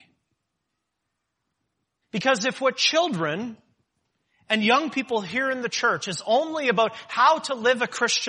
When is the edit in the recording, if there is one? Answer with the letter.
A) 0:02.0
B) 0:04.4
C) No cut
A